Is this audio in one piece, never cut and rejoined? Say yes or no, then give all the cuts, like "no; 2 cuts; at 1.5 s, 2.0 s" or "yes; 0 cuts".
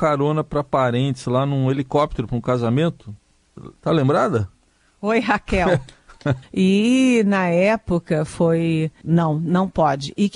no; 2 cuts; at 6.4 s, 9.0 s